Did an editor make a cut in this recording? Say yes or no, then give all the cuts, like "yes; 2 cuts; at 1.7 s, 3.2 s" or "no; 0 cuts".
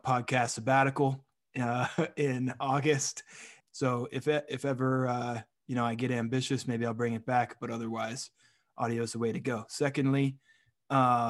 yes; 1 cut; at 3.6 s